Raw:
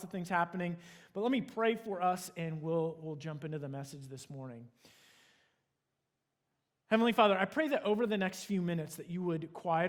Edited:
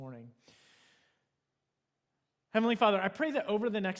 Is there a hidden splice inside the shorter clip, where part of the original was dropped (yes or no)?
no